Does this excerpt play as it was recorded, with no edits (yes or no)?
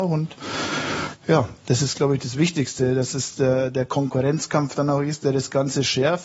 yes